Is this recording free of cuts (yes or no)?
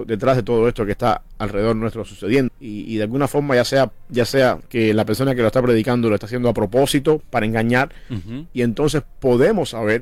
no